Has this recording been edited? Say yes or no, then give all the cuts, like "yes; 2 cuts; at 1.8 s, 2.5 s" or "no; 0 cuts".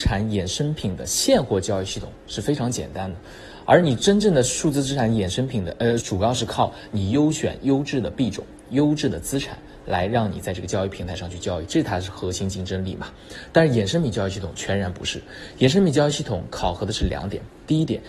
yes; 1 cut; at 6.0 s